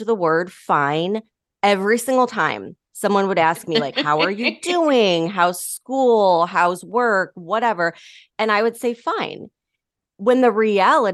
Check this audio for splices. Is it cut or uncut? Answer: uncut